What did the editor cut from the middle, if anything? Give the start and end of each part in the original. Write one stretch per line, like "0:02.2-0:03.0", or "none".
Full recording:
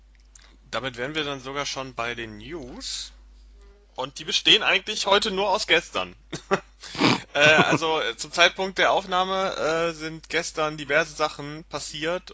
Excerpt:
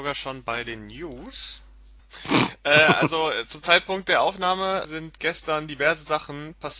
0:03.5-0:06.7
0:09.5-0:09.9